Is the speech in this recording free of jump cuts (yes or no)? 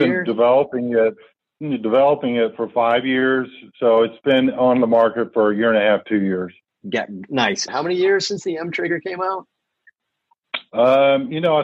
no